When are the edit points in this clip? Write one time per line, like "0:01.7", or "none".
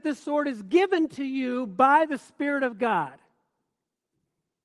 none